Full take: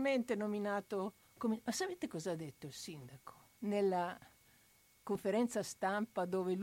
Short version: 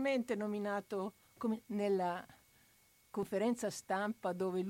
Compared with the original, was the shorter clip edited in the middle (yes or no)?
yes